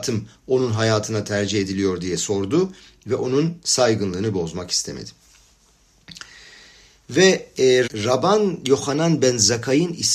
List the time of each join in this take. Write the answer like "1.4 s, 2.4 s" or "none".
7.9 s